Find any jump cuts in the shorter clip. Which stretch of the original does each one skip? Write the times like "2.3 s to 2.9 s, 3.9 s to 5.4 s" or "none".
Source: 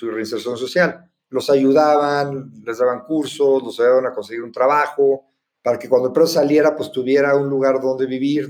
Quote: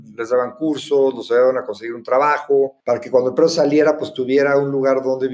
5.3 s to 5.6 s